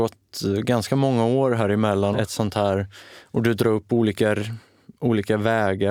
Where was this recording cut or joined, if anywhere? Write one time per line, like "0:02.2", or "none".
0:02.1